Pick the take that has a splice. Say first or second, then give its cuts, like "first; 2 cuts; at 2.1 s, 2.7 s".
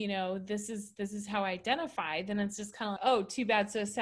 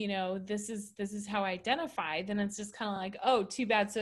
first; 1 cut; at 3.0 s